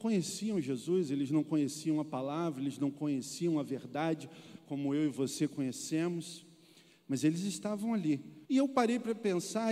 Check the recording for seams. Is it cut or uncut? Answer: cut